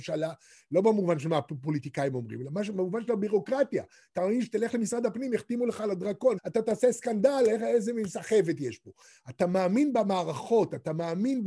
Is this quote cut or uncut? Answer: cut